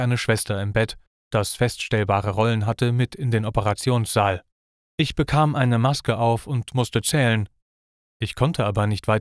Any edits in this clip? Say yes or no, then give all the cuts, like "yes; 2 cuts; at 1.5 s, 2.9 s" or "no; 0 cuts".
no; 0 cuts